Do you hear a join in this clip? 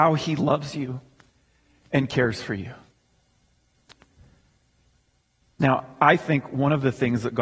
yes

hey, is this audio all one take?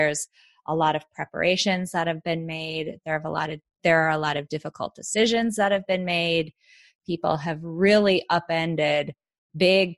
yes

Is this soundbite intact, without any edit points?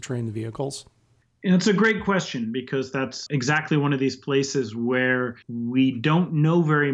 no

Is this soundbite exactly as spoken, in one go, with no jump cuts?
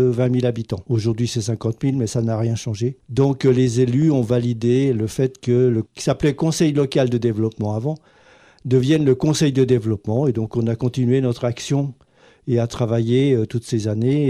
yes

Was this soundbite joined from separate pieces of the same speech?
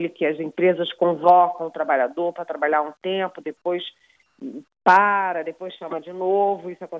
no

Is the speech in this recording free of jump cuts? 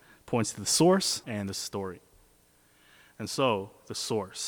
no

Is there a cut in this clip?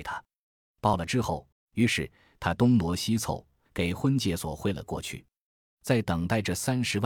yes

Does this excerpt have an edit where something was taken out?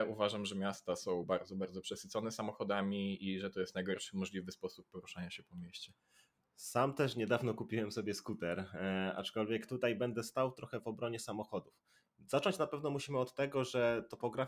no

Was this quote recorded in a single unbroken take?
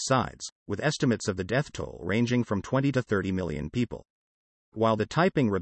yes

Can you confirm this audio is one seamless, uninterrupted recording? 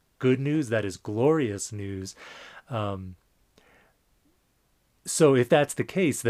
yes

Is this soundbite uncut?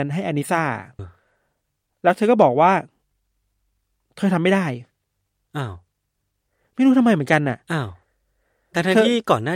no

